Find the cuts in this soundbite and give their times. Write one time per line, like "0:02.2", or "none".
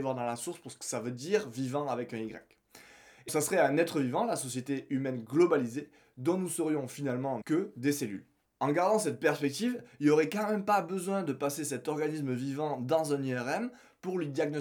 0:03.3
0:07.4